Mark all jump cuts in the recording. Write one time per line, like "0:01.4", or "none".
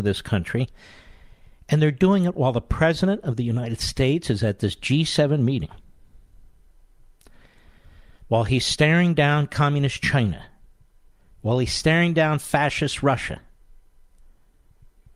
none